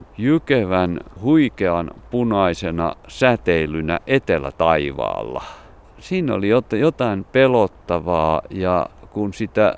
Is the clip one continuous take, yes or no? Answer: yes